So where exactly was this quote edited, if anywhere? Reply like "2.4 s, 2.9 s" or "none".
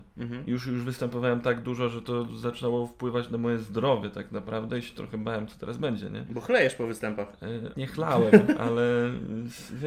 7.7 s